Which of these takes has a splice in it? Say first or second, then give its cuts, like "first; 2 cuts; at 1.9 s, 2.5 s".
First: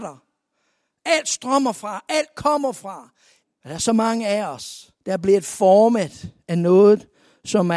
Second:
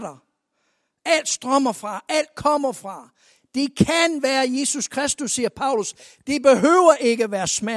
first; 2 cuts; at 3.4 s, 5.0 s